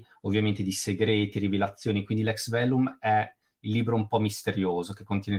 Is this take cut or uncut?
uncut